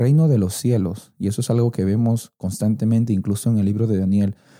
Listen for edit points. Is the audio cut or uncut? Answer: uncut